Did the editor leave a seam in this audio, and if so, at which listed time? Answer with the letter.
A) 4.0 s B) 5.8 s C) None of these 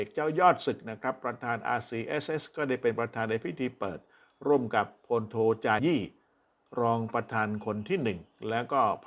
B